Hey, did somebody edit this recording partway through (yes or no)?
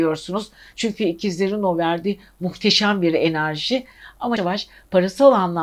yes